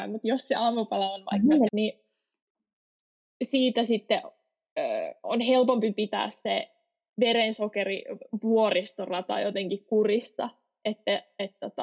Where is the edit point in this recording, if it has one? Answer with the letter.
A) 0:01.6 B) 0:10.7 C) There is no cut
A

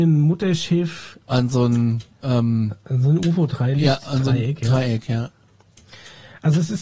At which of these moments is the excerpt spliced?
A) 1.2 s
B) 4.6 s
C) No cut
A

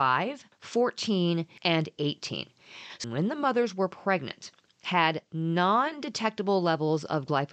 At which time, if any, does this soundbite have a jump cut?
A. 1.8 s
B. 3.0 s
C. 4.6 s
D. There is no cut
B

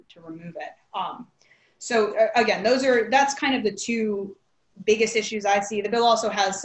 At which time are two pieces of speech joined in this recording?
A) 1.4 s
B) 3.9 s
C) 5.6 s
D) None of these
D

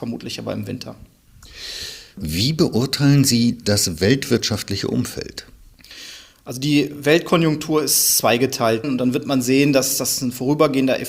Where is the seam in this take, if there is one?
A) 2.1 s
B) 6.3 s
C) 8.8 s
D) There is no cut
C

